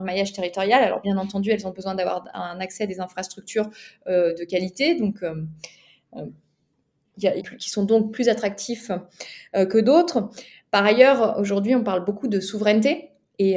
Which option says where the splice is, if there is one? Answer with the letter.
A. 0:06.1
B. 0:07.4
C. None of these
B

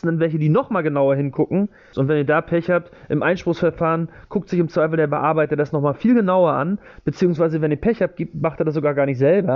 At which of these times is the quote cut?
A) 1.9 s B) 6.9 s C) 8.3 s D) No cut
A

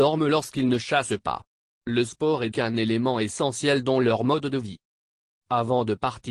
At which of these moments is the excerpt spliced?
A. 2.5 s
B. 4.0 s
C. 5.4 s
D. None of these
A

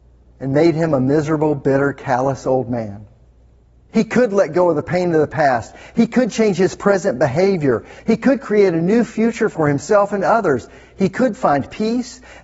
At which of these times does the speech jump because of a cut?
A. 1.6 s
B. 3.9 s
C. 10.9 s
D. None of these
B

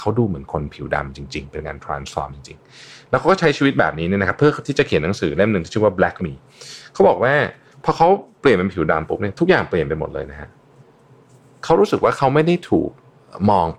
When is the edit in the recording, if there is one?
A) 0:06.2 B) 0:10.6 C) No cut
A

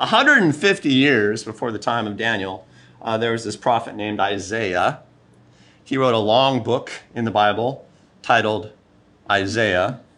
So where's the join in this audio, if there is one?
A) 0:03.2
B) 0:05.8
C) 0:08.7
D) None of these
B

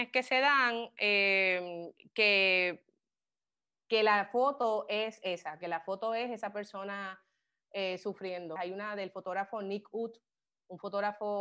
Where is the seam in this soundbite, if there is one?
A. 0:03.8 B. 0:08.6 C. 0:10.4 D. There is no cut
B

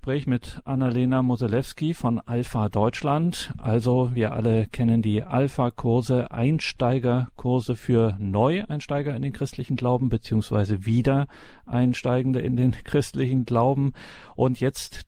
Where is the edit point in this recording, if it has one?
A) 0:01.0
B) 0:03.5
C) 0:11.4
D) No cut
D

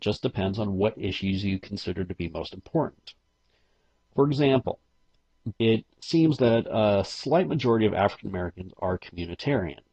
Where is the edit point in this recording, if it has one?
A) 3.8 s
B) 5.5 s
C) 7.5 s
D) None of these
B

